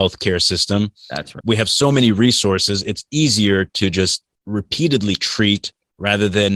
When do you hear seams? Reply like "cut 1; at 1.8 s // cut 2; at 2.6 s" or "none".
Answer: cut 1; at 1.4 s